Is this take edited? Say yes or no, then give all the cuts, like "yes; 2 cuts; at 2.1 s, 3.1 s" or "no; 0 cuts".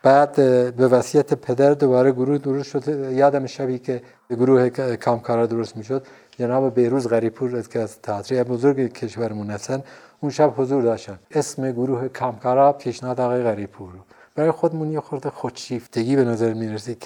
yes; 1 cut; at 11.2 s